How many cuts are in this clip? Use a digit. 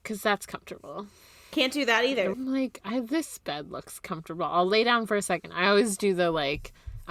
1